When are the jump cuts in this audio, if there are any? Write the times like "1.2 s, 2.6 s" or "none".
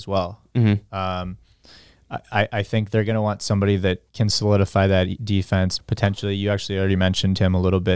4.1 s, 5.8 s